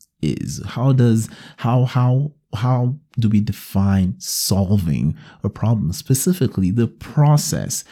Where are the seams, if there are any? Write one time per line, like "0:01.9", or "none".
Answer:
none